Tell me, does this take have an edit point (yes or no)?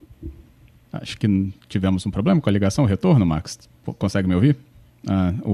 no